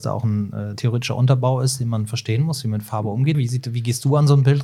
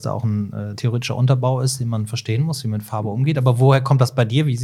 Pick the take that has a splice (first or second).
first